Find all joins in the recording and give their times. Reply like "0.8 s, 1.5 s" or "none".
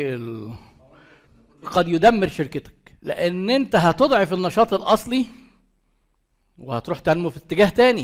1.6 s, 3.0 s